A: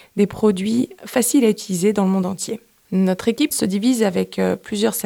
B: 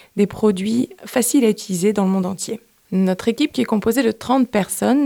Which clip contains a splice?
A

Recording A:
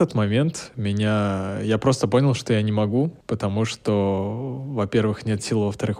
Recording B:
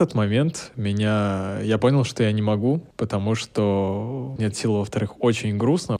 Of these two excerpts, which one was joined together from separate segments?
B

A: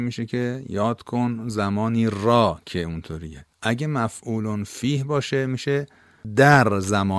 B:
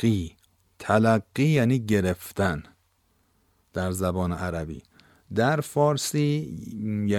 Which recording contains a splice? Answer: A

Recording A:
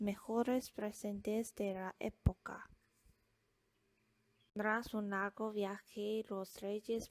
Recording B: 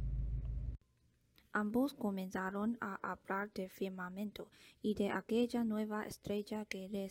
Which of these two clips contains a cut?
B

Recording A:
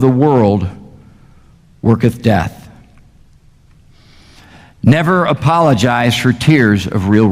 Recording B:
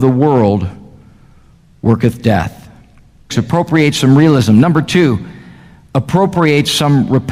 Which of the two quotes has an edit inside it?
B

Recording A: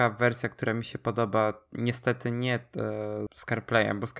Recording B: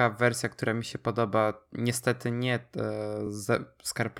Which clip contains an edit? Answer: A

